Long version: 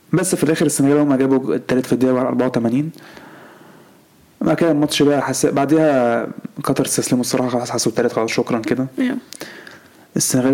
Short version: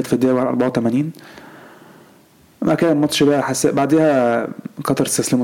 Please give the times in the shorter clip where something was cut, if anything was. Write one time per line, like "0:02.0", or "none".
none